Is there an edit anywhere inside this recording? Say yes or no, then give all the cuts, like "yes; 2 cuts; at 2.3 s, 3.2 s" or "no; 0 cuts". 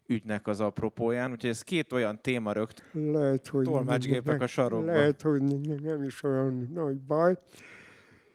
yes; 1 cut; at 2.8 s